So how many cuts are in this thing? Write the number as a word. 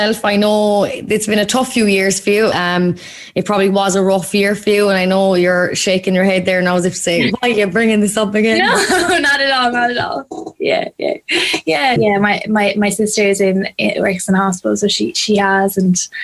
two